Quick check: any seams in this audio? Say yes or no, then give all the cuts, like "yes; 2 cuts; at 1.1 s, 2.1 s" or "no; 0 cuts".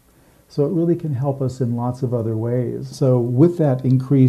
yes; 1 cut; at 2.9 s